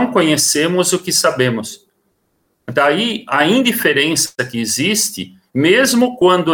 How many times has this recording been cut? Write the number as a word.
zero